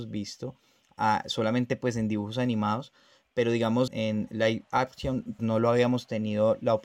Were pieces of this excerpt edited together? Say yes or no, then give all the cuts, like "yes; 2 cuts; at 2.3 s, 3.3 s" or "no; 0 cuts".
yes; 2 cuts; at 3.9 s, 5.4 s